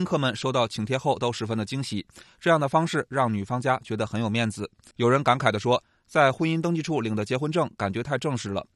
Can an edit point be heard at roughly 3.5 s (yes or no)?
no